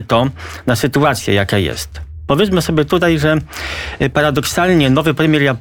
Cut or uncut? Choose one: uncut